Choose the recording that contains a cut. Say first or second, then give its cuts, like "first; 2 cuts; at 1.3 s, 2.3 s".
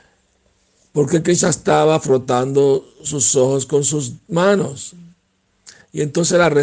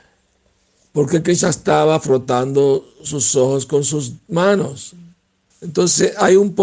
second; 1 cut; at 5.5 s